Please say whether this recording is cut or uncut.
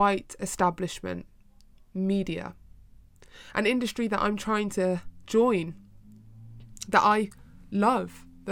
uncut